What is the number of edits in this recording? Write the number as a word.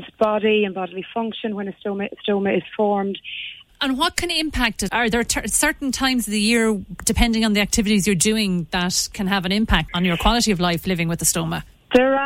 three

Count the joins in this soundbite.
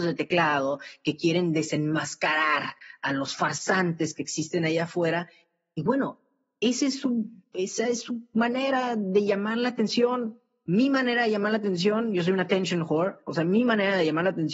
zero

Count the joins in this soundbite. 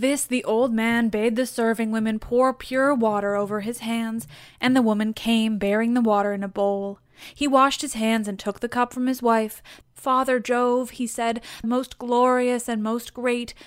two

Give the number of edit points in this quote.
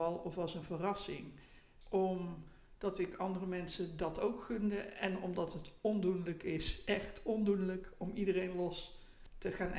one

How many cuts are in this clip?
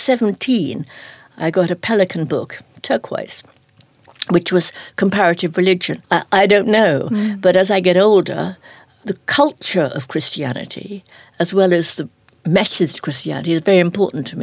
one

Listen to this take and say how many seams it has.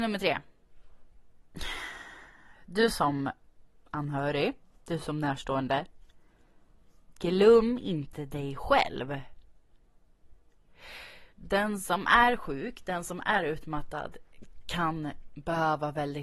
one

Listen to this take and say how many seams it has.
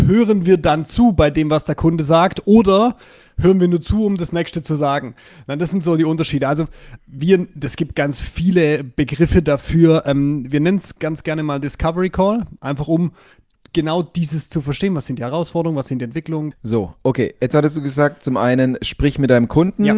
two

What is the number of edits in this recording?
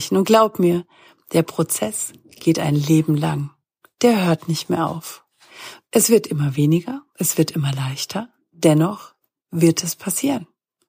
one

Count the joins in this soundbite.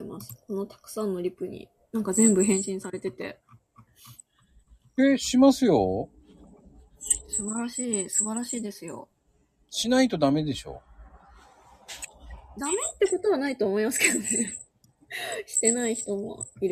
zero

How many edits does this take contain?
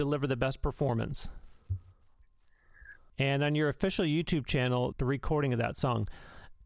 two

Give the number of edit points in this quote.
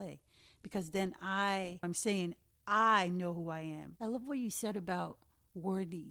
two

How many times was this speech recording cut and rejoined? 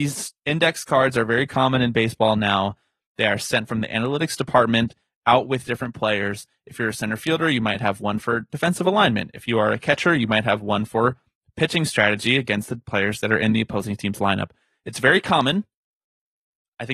zero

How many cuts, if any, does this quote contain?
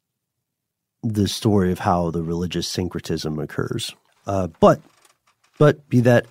one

